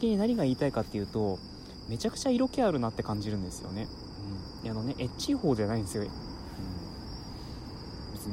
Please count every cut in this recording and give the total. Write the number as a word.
one